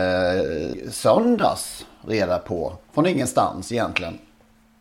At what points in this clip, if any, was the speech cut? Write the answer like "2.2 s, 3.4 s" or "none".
2.8 s